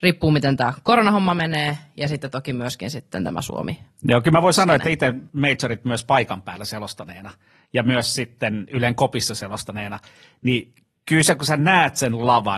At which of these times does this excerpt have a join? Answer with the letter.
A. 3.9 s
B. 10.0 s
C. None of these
C